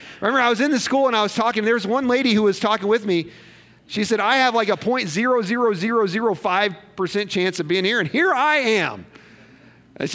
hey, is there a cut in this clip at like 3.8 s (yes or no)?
yes